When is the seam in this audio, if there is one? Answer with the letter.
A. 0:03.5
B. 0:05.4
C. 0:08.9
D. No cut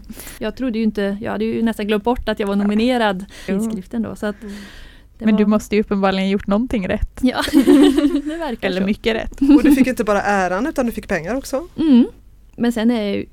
A